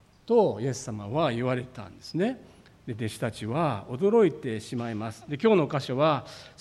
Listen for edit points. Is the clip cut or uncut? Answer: uncut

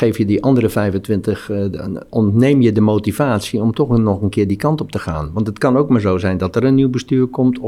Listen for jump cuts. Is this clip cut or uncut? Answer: uncut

